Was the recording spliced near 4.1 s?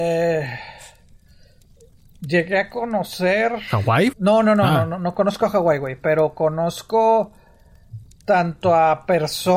yes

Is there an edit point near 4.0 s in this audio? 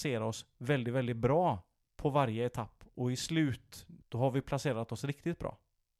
yes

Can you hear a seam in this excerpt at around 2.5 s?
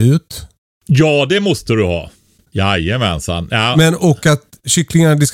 yes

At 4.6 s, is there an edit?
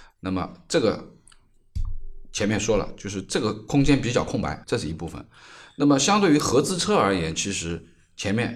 yes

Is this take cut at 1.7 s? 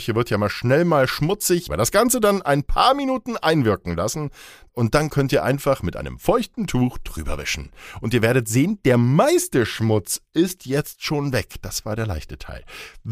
yes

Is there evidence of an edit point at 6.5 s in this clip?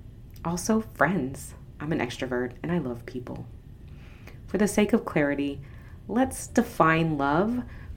yes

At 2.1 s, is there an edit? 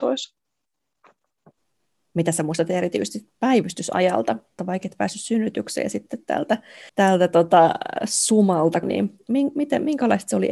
no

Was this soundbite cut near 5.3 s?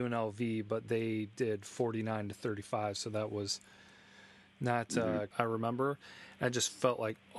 yes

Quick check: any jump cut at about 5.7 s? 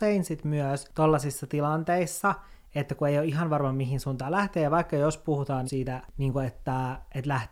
yes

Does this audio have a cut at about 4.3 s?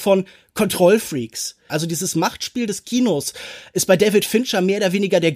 no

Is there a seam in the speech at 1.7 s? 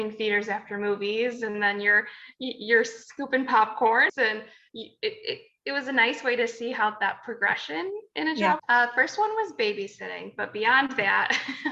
no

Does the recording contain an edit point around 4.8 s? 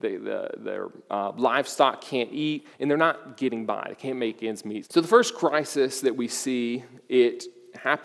yes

